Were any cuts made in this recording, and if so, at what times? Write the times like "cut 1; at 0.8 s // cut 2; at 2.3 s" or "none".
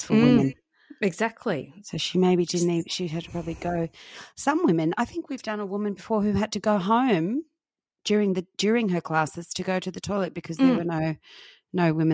none